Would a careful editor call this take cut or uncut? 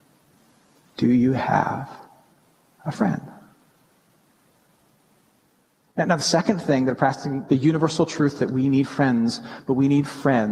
cut